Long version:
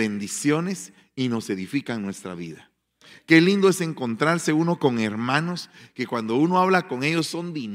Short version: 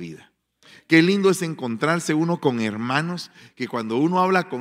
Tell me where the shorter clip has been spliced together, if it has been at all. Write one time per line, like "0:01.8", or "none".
none